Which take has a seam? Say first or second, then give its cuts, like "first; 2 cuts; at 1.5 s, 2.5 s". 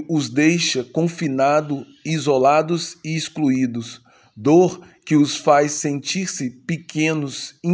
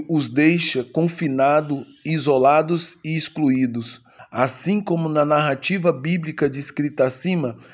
second; 1 cut; at 4.2 s